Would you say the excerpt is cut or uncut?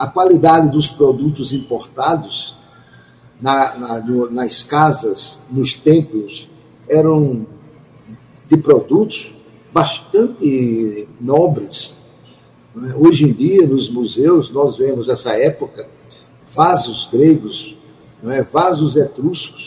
uncut